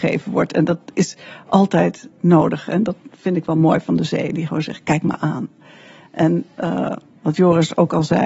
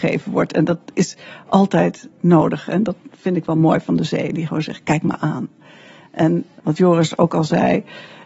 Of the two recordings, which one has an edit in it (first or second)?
second